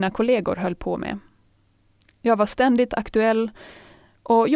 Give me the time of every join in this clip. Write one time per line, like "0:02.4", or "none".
none